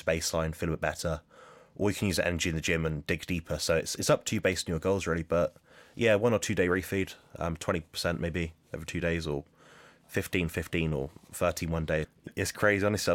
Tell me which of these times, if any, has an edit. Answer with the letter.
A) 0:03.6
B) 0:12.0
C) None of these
B